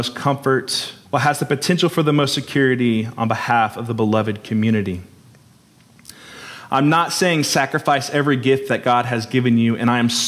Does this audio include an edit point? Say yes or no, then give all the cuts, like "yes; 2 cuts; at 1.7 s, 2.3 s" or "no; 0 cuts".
yes; 1 cut; at 1.0 s